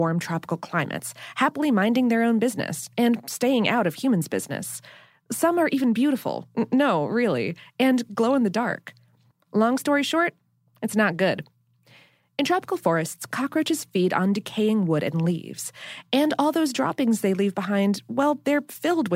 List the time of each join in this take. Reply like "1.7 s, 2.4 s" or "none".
9.3 s